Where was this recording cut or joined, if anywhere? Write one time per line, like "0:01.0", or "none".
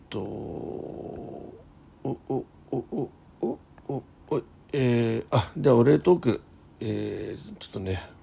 none